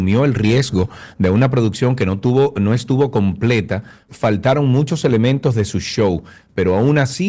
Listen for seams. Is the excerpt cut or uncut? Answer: cut